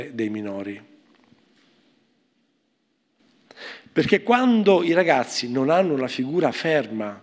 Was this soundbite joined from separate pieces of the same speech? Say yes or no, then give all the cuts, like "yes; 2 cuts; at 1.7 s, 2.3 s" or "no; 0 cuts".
yes; 1 cut; at 3.9 s